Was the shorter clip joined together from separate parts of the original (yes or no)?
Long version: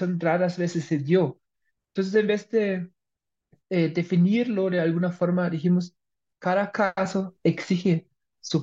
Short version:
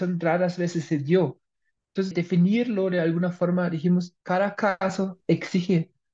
yes